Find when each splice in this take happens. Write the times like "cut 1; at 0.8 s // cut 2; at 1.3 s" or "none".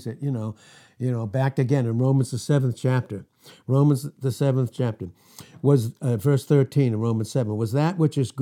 none